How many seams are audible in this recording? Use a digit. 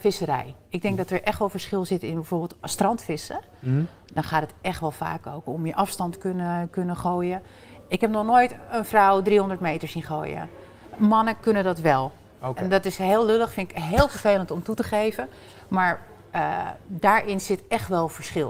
0